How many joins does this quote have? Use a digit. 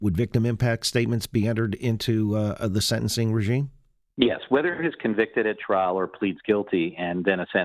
0